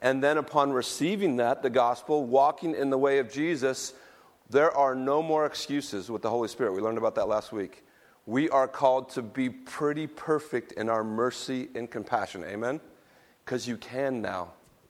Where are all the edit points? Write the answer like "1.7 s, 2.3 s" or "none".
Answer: none